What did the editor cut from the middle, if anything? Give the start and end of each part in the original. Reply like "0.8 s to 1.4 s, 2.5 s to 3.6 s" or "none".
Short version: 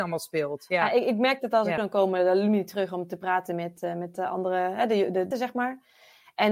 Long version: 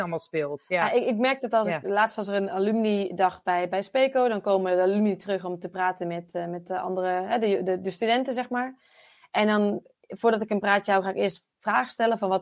1.8 s to 4.3 s, 7.8 s to 8.3 s